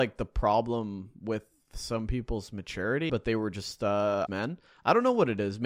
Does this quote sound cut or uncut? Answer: cut